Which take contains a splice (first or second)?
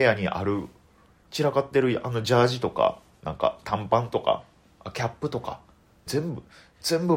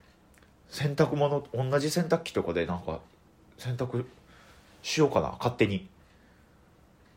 first